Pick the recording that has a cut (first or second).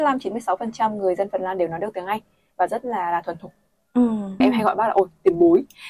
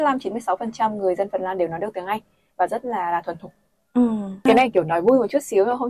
first